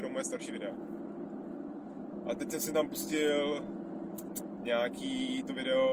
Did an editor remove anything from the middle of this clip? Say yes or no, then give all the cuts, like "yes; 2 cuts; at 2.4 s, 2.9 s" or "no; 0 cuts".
yes; 1 cut; at 2.2 s